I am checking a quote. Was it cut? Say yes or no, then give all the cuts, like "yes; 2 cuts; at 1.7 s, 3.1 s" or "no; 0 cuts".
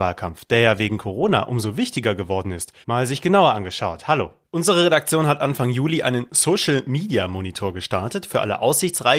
yes; 2 cuts; at 2.8 s, 4.4 s